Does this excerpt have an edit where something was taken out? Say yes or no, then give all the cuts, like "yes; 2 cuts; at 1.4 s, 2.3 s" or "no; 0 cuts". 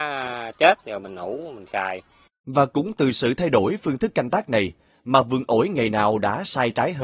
yes; 1 cut; at 2.3 s